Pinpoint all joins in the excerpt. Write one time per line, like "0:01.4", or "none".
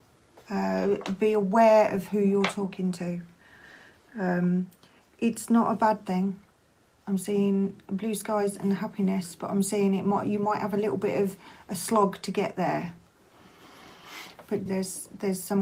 0:14.7